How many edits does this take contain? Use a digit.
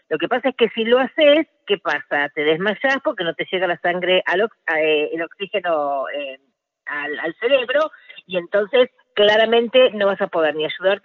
0